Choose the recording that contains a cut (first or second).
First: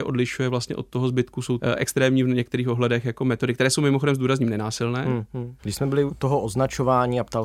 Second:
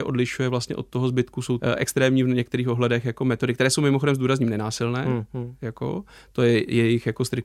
first